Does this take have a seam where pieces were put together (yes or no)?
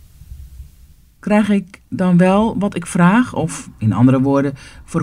yes